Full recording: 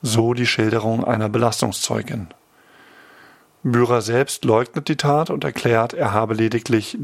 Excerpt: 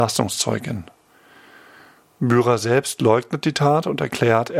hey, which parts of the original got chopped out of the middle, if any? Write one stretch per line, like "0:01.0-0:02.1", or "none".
none